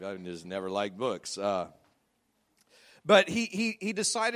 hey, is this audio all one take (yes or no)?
yes